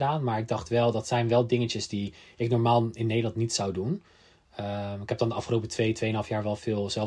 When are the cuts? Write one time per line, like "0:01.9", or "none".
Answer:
none